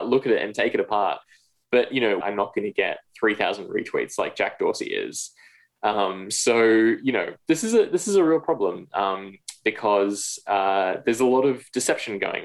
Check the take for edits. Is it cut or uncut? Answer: cut